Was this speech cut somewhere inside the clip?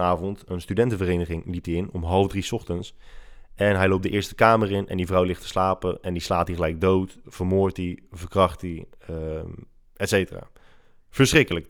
no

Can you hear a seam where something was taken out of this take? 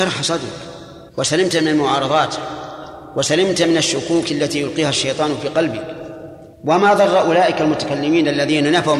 yes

